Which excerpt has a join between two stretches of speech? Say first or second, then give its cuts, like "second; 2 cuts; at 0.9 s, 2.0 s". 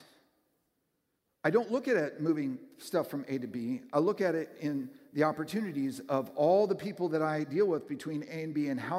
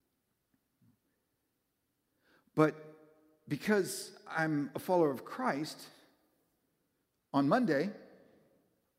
first; 1 cut; at 1.2 s